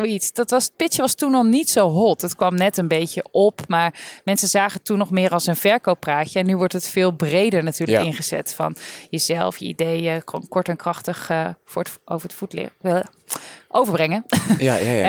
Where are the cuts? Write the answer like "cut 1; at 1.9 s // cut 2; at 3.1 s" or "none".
none